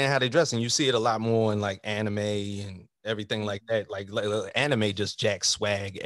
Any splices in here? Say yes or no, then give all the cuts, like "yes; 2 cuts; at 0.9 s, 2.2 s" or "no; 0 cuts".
no; 0 cuts